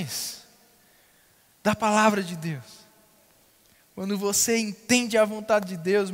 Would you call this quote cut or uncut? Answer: uncut